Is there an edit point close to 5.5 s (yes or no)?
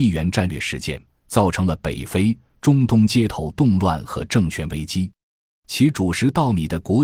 yes